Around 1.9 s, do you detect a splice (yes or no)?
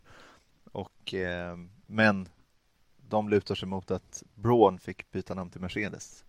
yes